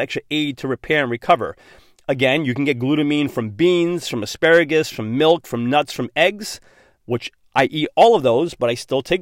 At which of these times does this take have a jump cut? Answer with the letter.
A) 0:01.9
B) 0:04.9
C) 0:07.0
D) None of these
D